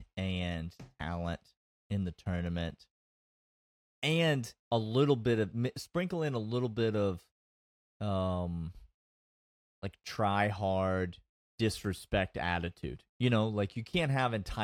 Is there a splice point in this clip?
yes; 1 cut; at 4.6 s

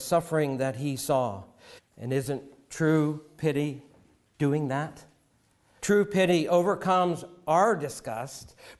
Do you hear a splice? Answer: yes; 2 cuts; at 1.8 s, 5.8 s

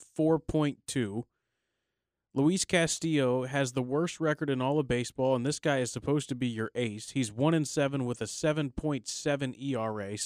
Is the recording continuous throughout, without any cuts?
yes; 0 cuts

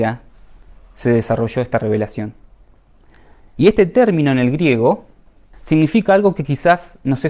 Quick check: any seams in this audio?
yes; 2 cuts; at 3.4 s, 5.5 s

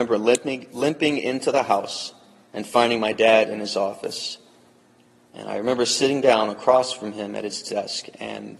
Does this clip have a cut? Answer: no; 0 cuts

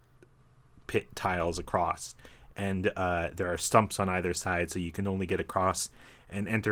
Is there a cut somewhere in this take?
no; 0 cuts

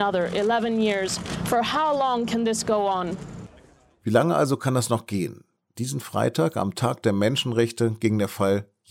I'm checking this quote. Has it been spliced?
no; 0 cuts

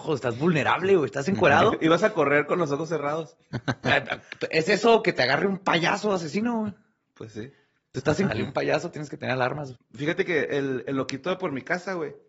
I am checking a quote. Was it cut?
yes; 2 cuts; at 8.3 s, 9.7 s

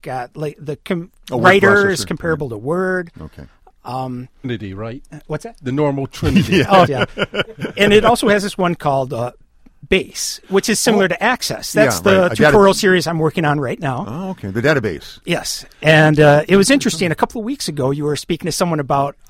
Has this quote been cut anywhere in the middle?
yes; 2 cuts; at 4.4 s, 6.9 s

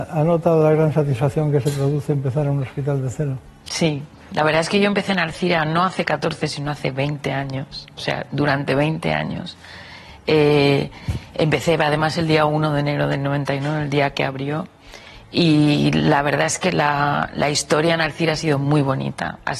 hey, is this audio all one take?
yes; 0 cuts

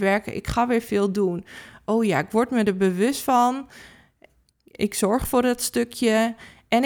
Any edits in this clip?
no; 0 cuts

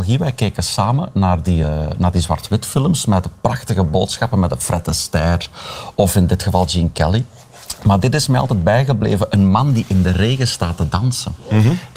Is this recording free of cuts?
yes; 0 cuts

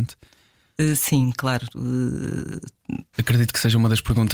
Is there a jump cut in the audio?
yes; 1 cut; at 3.1 s

